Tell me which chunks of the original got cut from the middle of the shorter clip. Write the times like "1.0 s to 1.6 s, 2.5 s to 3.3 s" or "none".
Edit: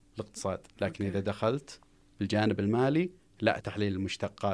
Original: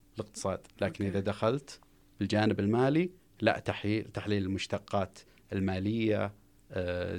3.6 s to 4.1 s